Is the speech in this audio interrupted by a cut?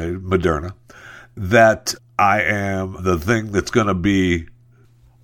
yes; 2 cuts; at 2.0 s, 3.0 s

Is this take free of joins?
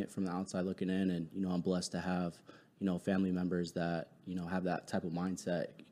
yes; 0 cuts

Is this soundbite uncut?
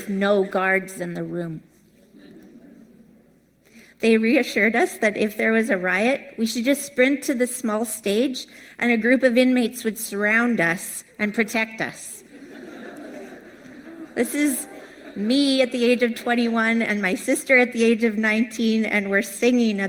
yes; 0 cuts

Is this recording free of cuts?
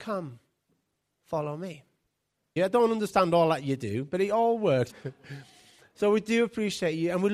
no; 2 cuts; at 2.6 s, 4.9 s

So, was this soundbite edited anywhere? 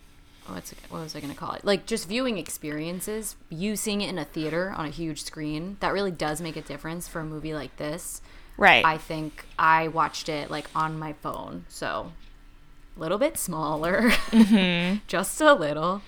no; 0 cuts

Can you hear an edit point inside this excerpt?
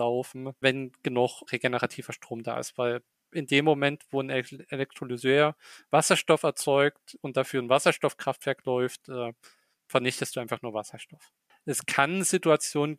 yes; 1 cut; at 11.5 s

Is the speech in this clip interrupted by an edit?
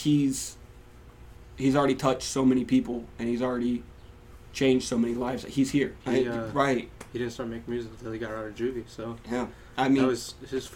yes; 1 cut; at 6.0 s

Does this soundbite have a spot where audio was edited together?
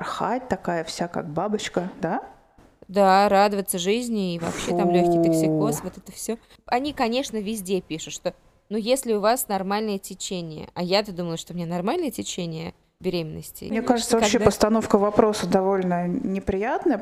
no; 0 cuts

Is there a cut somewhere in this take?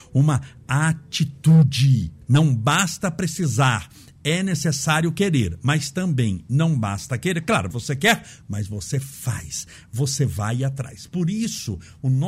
yes; 2 cuts; at 2.2 s, 7.7 s

